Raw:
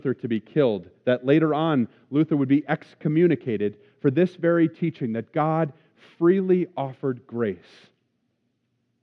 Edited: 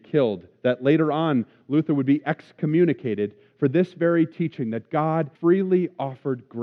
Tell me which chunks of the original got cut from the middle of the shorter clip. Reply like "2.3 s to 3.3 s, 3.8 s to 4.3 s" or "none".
5.8 s to 6.1 s